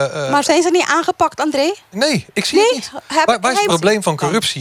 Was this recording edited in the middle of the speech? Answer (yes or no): yes